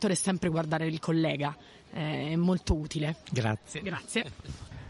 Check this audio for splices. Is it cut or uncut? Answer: cut